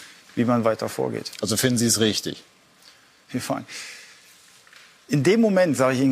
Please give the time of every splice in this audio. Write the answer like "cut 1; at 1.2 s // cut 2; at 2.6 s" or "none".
none